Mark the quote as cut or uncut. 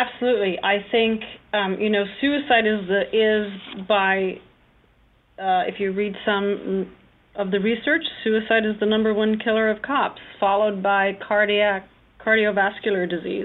uncut